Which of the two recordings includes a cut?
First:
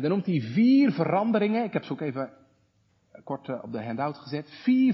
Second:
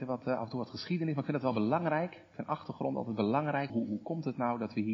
second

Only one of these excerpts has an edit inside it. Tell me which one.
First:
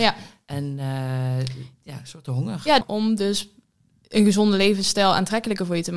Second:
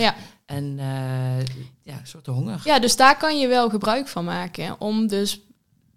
first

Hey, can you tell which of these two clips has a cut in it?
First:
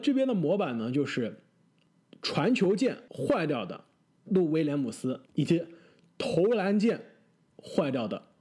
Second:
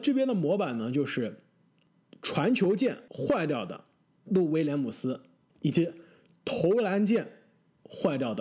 first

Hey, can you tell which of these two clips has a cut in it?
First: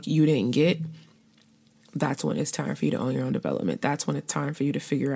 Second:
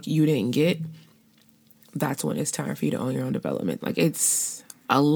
second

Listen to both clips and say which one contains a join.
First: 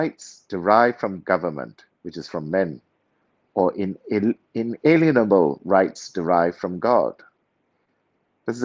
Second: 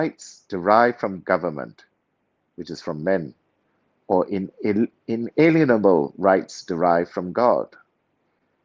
first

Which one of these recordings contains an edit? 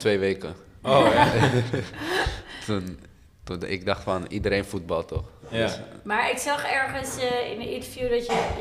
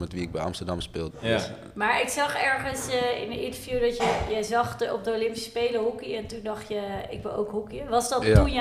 second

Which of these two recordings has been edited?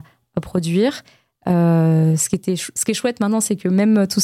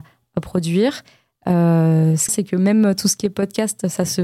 second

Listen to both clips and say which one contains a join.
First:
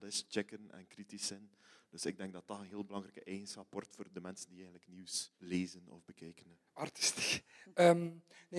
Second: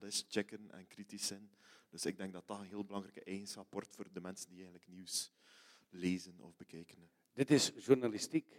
first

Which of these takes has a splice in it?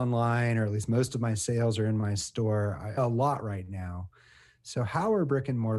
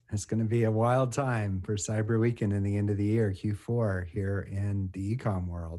first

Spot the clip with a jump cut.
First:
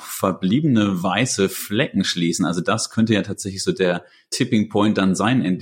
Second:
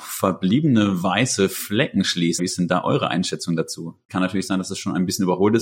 second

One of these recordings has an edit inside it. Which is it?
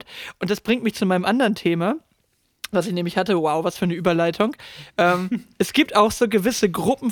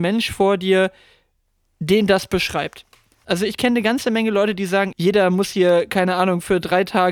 second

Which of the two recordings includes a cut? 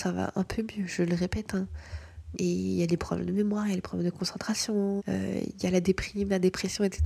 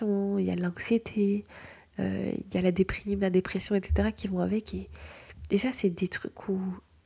first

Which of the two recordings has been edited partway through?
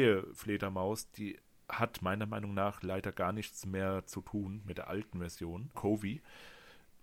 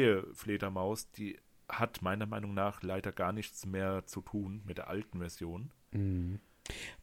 first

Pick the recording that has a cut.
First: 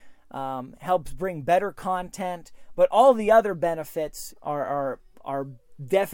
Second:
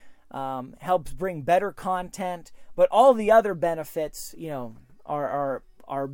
first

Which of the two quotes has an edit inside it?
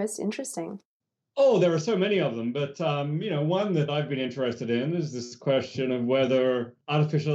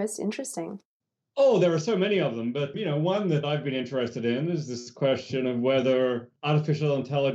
second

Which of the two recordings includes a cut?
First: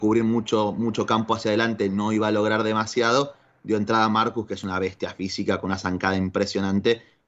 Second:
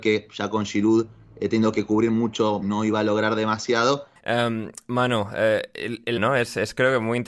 second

